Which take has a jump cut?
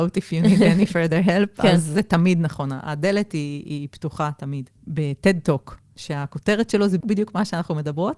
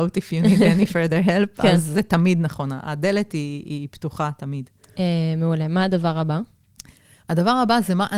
first; 2 cuts; at 4.8 s, 7.0 s

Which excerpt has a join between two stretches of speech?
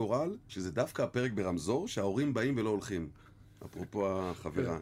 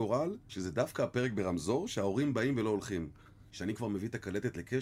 second; 1 cut; at 3.5 s

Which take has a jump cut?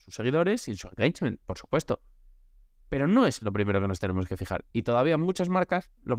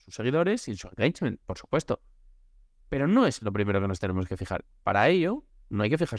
second; 1 cut; at 4.7 s

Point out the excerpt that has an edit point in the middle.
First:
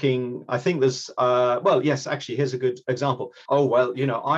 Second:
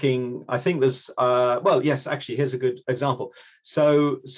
first; 1 cut; at 3.5 s

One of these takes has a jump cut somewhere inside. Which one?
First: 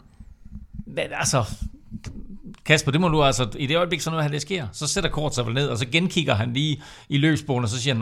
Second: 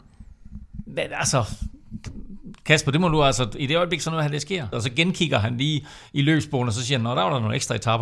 second; 1 cut; at 4.7 s

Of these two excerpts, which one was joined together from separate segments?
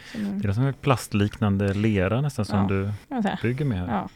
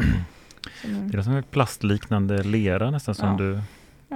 first; 1 cut; at 3.0 s

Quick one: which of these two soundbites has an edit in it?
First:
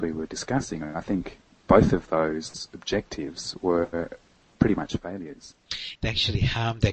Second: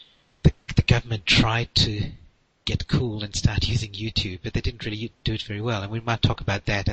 first; 1 cut; at 5.9 s

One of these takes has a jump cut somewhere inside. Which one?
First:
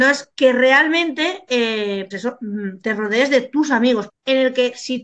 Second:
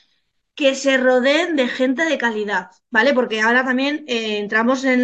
first; 2 cuts; at 2.1 s, 4.1 s

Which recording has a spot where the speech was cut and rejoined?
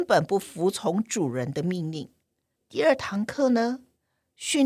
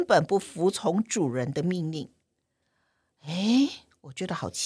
first; 1 cut; at 2.5 s

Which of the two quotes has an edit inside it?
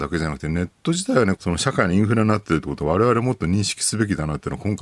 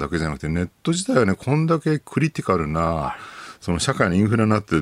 first; 1 cut; at 1.4 s

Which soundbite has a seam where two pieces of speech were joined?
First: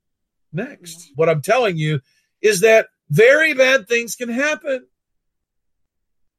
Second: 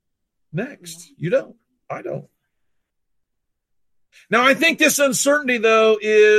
first; 1 cut; at 1.1 s

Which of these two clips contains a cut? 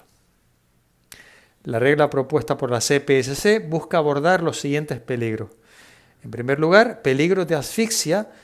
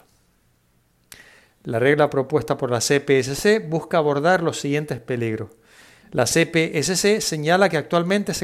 second; 1 cut; at 6.0 s

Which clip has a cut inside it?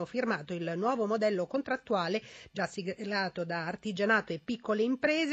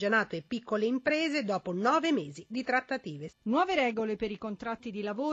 second; 1 cut; at 3.3 s

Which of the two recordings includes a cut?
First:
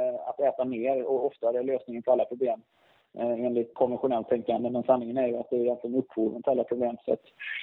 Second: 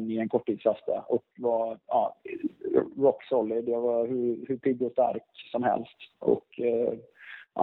first; 1 cut; at 3.7 s

